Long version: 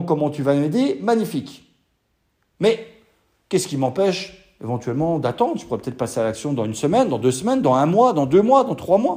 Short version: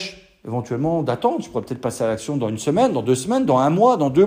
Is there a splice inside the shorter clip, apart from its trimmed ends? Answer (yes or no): no